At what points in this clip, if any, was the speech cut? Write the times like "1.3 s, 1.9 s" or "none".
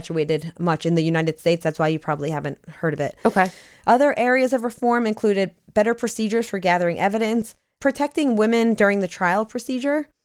none